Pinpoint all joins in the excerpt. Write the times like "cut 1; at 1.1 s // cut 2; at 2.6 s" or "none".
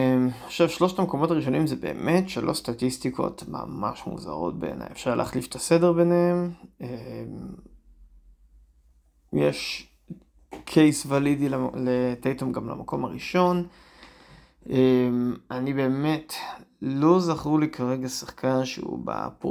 none